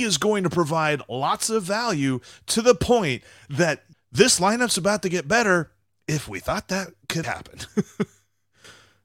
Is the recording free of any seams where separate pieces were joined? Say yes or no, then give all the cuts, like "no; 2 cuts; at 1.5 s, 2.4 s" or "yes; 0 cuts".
no; 2 cuts; at 3.9 s, 7.2 s